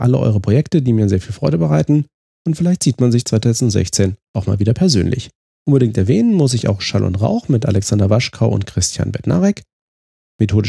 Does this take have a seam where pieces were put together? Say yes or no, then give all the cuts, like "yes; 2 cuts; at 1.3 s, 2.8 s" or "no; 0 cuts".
yes; 1 cut; at 5.5 s